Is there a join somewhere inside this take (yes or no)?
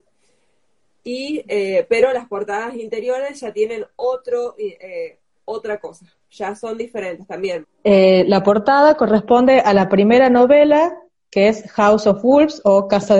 yes